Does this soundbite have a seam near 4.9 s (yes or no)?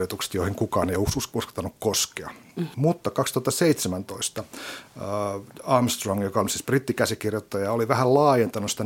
no